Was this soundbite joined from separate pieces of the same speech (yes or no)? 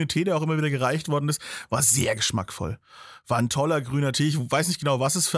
no